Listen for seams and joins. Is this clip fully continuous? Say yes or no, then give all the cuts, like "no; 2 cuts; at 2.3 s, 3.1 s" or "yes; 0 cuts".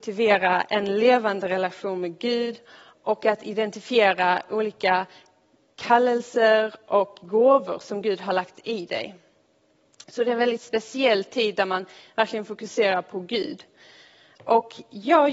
yes; 0 cuts